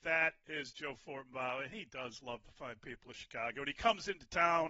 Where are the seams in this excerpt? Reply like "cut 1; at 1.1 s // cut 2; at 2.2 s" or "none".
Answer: none